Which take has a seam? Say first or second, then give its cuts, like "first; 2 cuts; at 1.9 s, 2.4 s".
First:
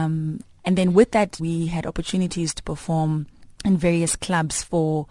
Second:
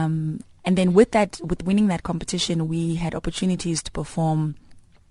first; 2 cuts; at 1.4 s, 3.5 s